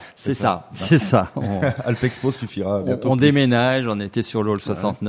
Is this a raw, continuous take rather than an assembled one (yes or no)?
yes